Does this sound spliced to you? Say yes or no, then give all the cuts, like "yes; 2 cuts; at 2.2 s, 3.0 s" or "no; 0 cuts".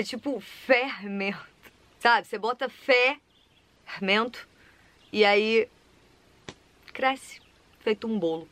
no; 0 cuts